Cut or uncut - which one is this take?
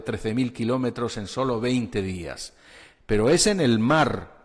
uncut